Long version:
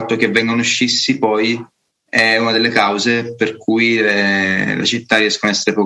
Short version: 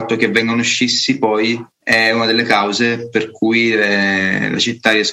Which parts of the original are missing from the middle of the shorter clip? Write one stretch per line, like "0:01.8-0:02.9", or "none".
0:01.7-0:02.0